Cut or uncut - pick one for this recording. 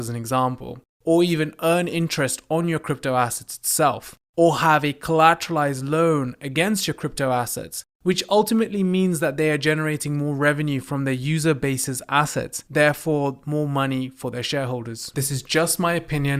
cut